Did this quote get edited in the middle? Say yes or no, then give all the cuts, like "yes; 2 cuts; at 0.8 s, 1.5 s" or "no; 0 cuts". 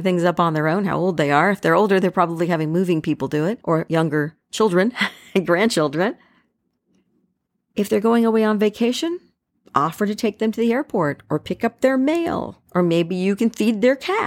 no; 0 cuts